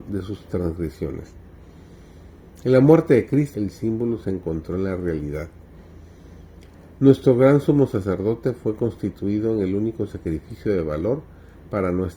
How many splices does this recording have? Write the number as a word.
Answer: one